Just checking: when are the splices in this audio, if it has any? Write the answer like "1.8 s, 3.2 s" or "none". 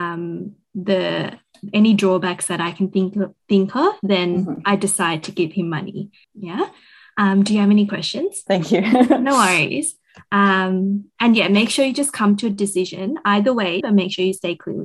6.2 s, 8.5 s, 13.8 s